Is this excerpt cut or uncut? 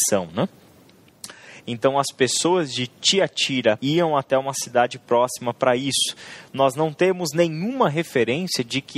cut